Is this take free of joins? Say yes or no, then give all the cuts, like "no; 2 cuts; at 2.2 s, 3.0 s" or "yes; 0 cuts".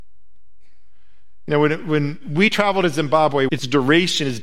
no; 1 cut; at 3.5 s